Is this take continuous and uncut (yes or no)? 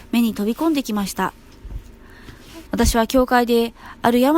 no